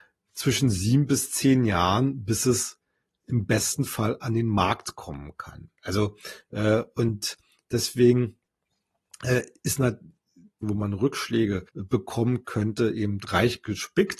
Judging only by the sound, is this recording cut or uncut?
cut